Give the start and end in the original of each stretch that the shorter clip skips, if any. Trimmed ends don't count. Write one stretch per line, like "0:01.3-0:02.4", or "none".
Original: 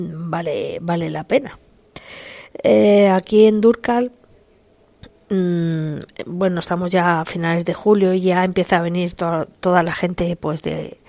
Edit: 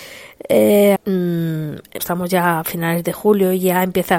0:03.1-0:05.2
0:06.2-0:06.6